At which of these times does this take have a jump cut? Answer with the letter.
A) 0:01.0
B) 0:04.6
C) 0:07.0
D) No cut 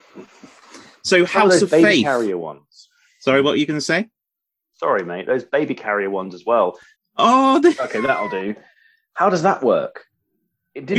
C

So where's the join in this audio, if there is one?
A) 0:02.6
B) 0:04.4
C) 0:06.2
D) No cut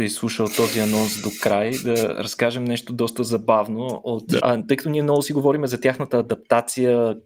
B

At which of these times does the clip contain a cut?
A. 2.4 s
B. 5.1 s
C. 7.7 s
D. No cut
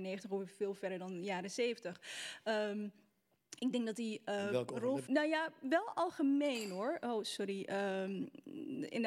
B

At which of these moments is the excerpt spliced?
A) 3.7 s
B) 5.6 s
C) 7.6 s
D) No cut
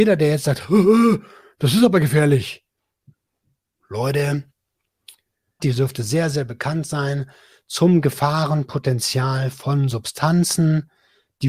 B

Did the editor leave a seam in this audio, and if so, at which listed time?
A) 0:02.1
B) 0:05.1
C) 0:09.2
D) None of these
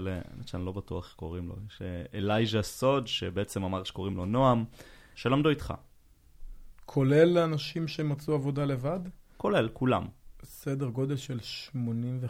B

